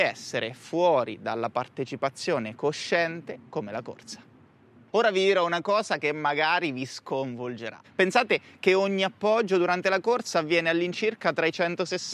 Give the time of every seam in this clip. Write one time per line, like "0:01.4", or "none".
0:04.9
0:07.8